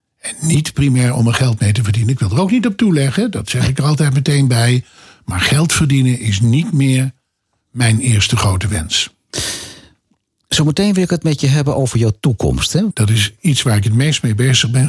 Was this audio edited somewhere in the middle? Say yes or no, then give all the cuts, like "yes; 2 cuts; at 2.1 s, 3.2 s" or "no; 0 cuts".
yes; 1 cut; at 12.9 s